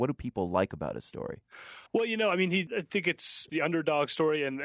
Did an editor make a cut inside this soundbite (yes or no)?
yes